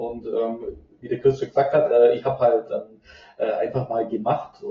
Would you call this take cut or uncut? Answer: uncut